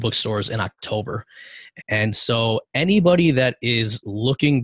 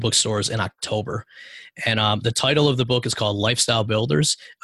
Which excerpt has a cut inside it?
first; 1 cut; at 1.8 s

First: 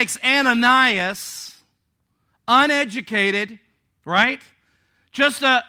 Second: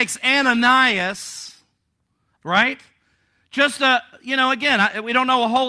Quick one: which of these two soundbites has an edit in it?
second; 1 cut; at 2.4 s

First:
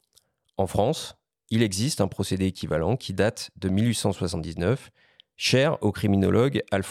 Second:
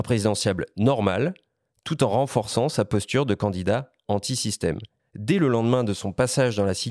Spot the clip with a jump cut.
second; 1 cut; at 5.0 s

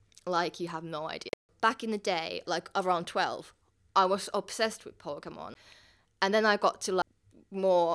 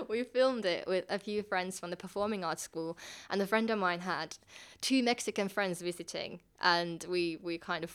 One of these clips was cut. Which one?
first; 1 cut; at 2.4 s

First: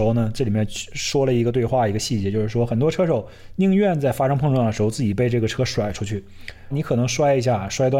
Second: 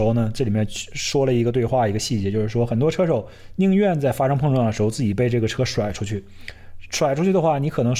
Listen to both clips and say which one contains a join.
first; 1 cut; at 6.7 s

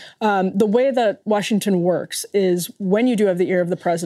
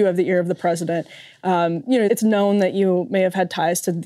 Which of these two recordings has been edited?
second; 1 cut; at 2.1 s

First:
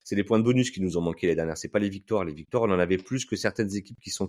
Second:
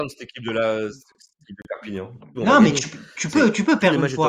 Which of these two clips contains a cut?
second; 1 cut; at 2.4 s

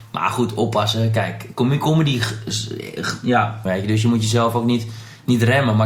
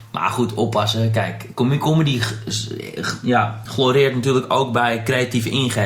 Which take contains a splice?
first; 1 cut; at 3.7 s

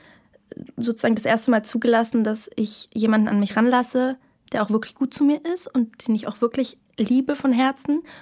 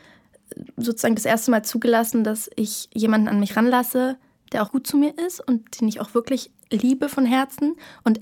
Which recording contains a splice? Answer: second; 1 cut; at 4.7 s

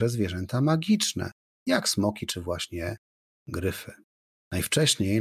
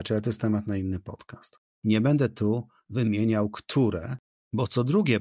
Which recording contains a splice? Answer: second; 1 cut; at 1.7 s

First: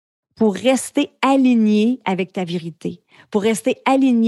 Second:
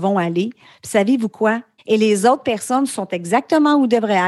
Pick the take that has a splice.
second; 1 cut; at 1.8 s

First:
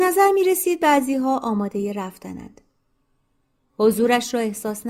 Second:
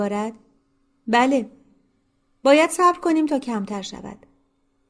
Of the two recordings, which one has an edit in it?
first; 1 cut; at 3.7 s

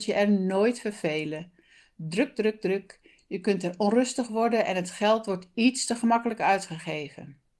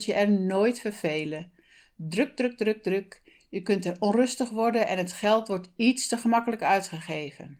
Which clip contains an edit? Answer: first; 1 cut; at 2.3 s

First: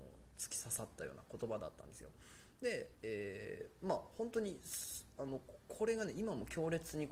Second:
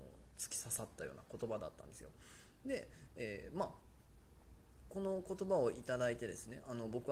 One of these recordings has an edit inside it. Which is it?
first; 1 cut; at 2.5 s

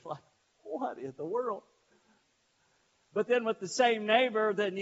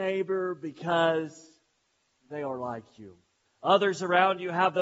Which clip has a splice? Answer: second; 1 cut; at 3.5 s

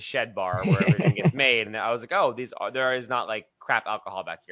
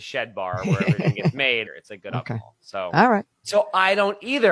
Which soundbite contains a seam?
second; 2 cuts; at 1.7 s, 3.4 s

